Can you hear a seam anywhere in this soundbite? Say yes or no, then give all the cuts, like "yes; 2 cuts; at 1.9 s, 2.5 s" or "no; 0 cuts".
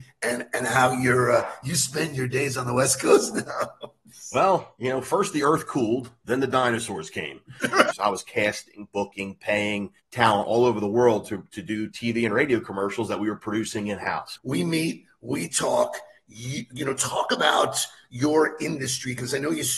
yes; 3 cuts; at 7.9 s, 10.0 s, 14.4 s